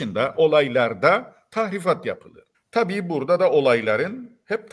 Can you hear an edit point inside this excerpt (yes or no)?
yes